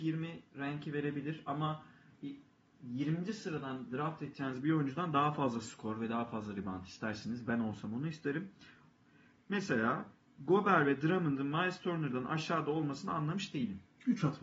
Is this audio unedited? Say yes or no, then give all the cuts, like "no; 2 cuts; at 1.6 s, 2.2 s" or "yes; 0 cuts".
yes; 0 cuts